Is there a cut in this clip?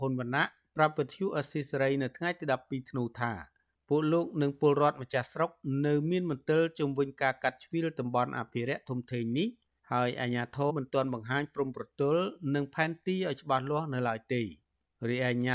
yes; 1 cut; at 10.7 s

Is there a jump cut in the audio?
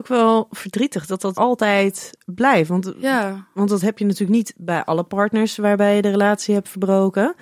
yes; 1 cut; at 1.3 s

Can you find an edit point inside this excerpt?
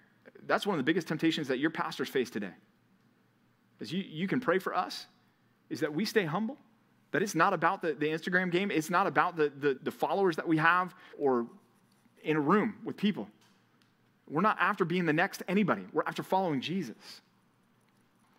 yes; 2 cuts; at 9.8 s, 11.1 s

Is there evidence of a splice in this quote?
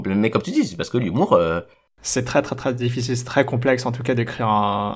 no; 0 cuts

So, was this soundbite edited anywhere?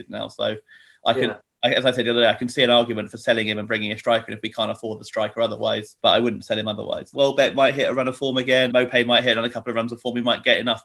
yes; 3 cuts; at 6.0 s, 7.1 s, 8.7 s

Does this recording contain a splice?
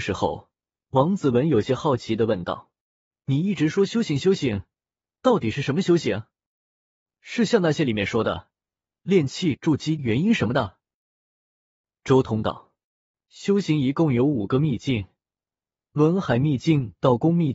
yes; 1 cut; at 10.0 s

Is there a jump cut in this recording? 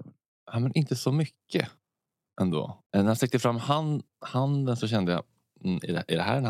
yes; 1 cut; at 2.9 s

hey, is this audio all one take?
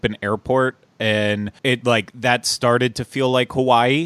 no; 1 cut; at 1.6 s

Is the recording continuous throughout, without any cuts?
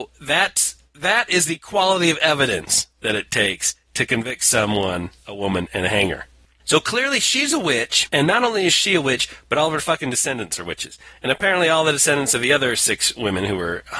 no; 1 cut; at 8.1 s

